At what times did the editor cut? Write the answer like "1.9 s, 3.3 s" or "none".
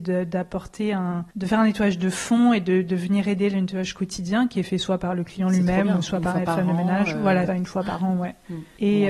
1.3 s, 7.5 s